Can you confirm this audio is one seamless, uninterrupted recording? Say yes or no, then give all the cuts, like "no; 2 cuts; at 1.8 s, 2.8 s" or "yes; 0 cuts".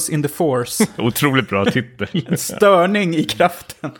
yes; 0 cuts